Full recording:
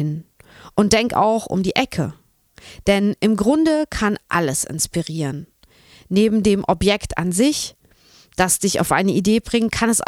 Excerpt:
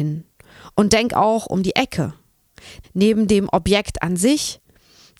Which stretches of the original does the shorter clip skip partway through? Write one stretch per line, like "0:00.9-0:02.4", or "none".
0:02.8-0:06.0